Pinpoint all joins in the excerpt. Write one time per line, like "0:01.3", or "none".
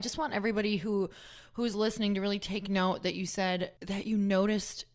0:03.8

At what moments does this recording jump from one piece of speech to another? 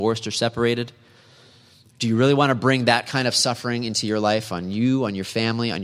none

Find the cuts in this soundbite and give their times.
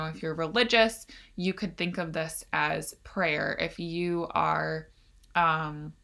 none

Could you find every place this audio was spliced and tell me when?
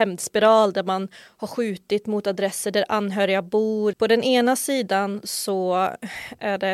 0:03.9

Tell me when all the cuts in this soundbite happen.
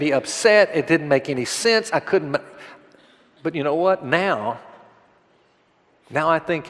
none

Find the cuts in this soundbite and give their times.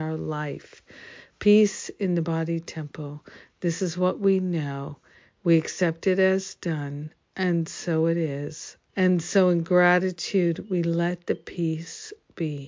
0:08.9

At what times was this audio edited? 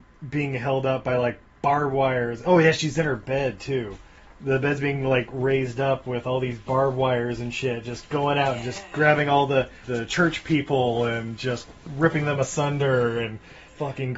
none

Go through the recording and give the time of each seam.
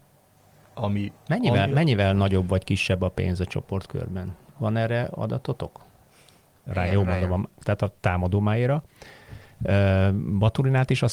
0:06.7

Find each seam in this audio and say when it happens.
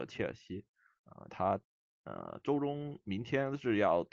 0:01.3

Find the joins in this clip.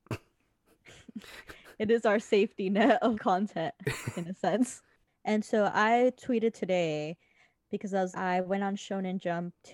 0:03.1
0:08.1

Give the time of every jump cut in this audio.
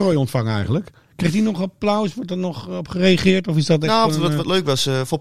0:04.1

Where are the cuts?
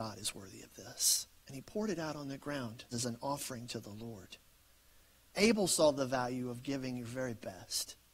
0:02.9

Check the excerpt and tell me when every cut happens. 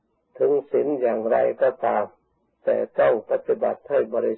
none

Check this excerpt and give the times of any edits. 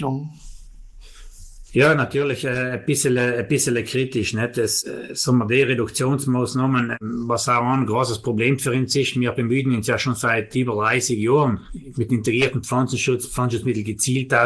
none

